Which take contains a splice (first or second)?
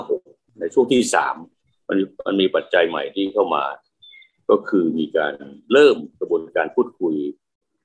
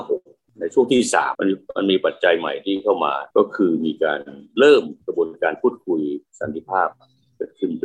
second